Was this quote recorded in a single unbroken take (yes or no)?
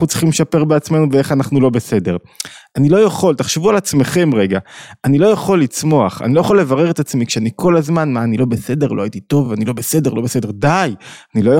yes